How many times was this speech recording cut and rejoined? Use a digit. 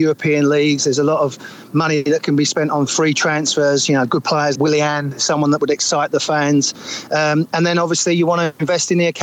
1